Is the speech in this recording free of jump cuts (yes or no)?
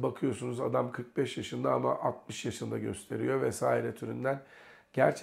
yes